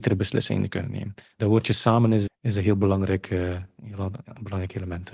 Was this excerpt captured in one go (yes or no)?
no